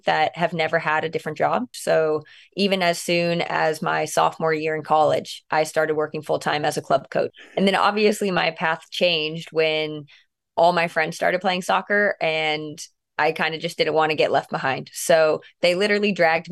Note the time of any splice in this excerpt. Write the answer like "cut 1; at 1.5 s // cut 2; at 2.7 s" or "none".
cut 1; at 1.7 s // cut 2; at 7.3 s